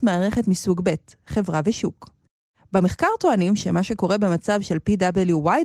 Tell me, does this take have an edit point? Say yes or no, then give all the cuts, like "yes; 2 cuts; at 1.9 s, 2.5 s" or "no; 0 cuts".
no; 0 cuts